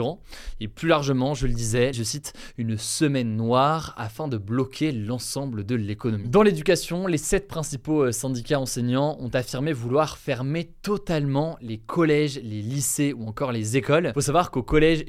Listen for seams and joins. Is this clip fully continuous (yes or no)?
no